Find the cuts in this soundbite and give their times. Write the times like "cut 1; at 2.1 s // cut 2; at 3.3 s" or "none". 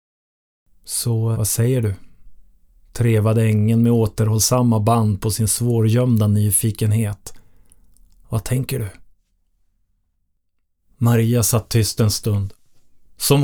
cut 1; at 1.3 s